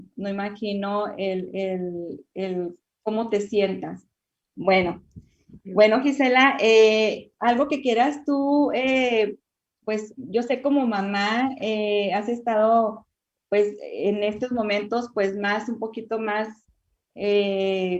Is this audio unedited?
no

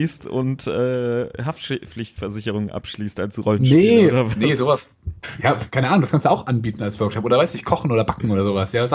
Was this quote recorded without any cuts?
yes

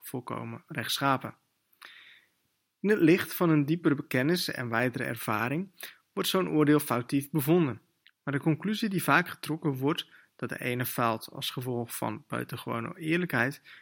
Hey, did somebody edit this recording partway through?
yes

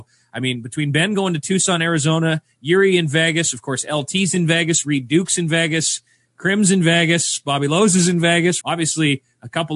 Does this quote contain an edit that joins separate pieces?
yes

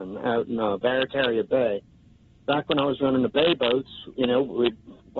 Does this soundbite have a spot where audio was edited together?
yes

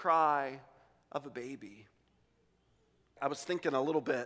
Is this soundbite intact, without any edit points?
yes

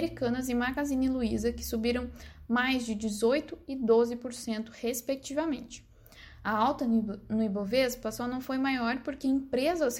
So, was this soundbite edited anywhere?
no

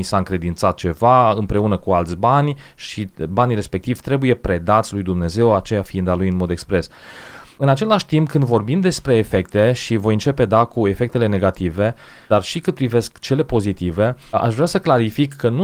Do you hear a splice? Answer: no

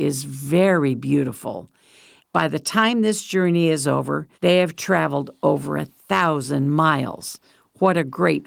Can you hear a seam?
yes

